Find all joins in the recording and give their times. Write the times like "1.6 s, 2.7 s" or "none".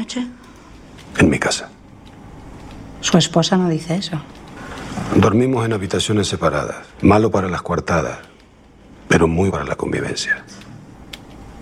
6.9 s, 9.5 s